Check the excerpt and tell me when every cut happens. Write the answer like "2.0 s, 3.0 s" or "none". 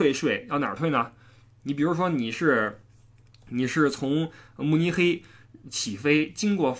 1.6 s